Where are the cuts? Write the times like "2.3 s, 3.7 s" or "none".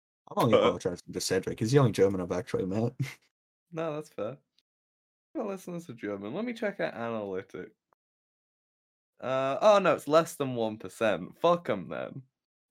none